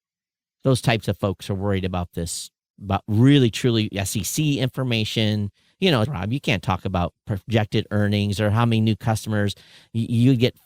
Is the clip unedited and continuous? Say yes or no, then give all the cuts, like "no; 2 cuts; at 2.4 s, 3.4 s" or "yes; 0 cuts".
no; 1 cut; at 6.0 s